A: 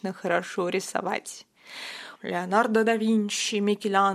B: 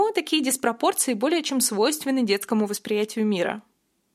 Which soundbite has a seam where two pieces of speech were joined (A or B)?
A